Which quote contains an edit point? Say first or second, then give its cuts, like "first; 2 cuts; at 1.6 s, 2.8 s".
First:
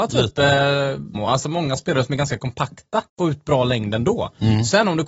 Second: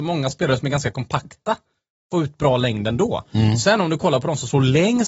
first; 2 cuts; at 1.1 s, 3.1 s